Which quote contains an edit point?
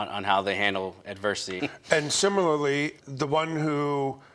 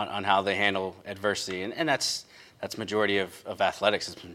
first; 2 cuts; at 1.6 s, 3.0 s

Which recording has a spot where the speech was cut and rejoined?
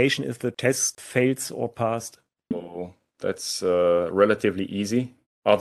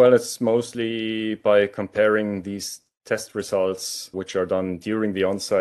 first; 1 cut; at 2.5 s

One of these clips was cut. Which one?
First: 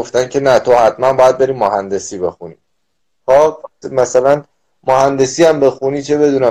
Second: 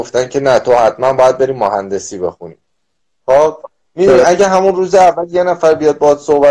first; 1 cut; at 3.8 s

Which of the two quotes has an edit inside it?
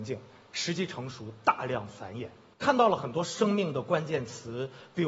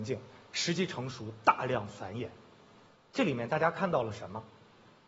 first; 1 cut; at 2.5 s

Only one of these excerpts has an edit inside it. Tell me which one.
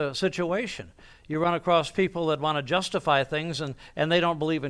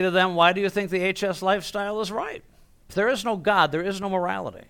second; 1 cut; at 2.9 s

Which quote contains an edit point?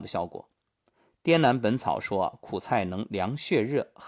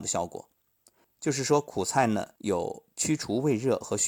second; 2 cuts; at 1.0 s, 2.4 s

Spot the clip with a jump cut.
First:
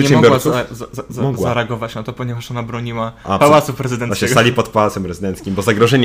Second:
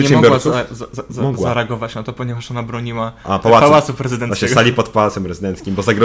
first; 1 cut; at 3.4 s

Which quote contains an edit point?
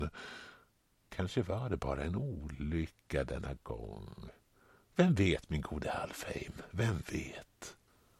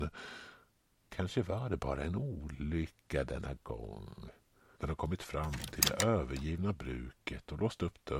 second; 1 cut; at 4.8 s

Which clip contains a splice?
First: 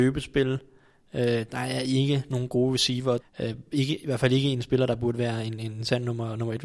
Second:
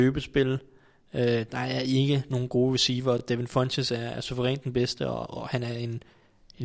first; 1 cut; at 3.2 s

